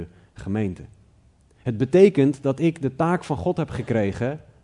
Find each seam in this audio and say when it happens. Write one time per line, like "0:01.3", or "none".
0:01.4